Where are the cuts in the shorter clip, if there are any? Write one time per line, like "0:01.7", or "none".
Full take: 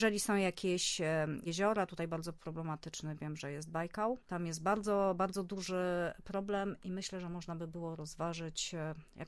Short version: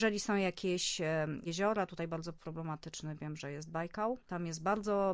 none